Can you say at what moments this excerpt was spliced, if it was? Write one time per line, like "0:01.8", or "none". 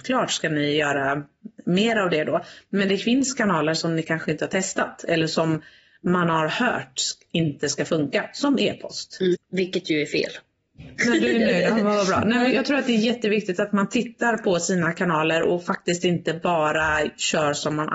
0:09.3
0:11.0
0:12.5